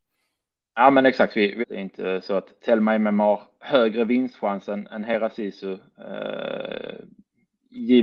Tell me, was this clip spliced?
yes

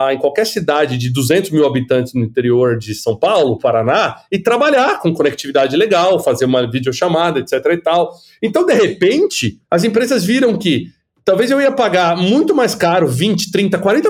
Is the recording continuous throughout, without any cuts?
no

